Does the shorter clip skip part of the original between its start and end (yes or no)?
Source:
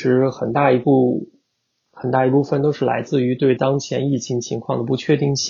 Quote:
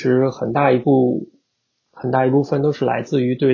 no